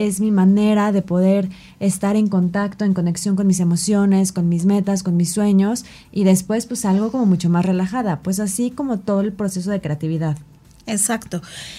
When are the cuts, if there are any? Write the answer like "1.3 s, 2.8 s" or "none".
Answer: none